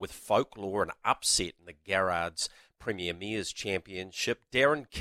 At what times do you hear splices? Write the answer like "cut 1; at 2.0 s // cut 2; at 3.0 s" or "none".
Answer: none

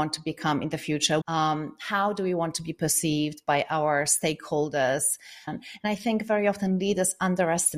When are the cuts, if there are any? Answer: cut 1; at 1.2 s // cut 2; at 5.5 s

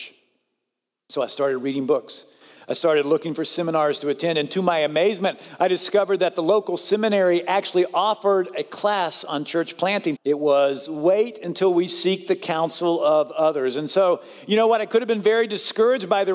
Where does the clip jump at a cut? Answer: cut 1; at 10.2 s

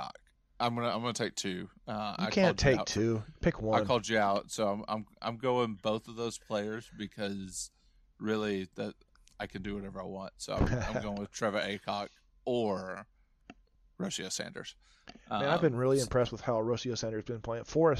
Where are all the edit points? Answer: none

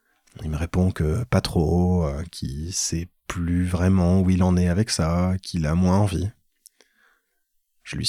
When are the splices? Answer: none

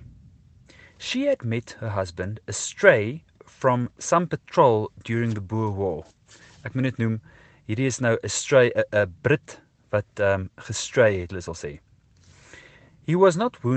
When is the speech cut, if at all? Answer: cut 1; at 11.3 s

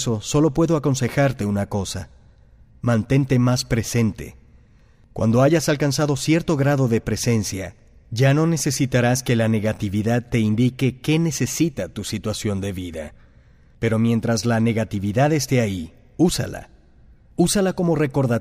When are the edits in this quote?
none

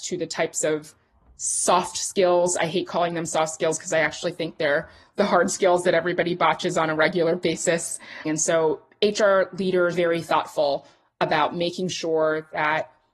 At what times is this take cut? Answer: cut 1; at 8.3 s // cut 2; at 9.9 s

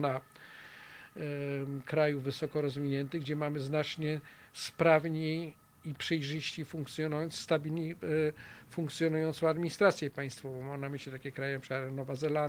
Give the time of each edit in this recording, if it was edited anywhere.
none

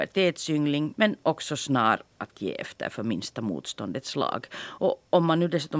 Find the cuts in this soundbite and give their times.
cut 1; at 0.9 s

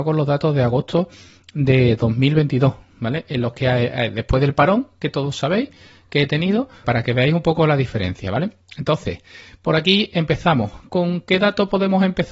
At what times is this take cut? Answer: cut 1; at 6.8 s // cut 2; at 10.9 s

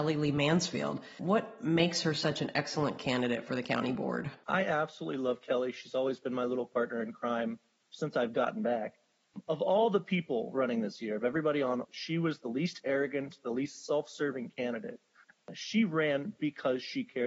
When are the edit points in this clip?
cut 1; at 11.8 s // cut 2; at 15.3 s

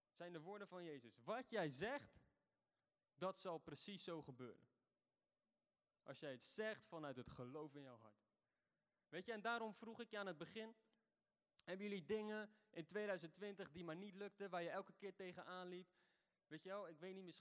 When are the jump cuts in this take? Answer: none

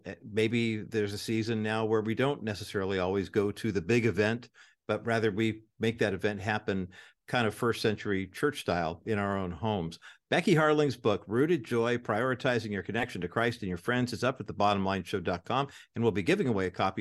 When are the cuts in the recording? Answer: none

